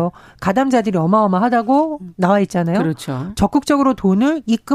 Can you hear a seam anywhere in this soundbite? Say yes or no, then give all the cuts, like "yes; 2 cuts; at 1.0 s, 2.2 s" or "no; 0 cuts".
no; 0 cuts